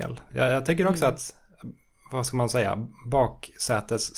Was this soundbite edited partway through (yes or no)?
no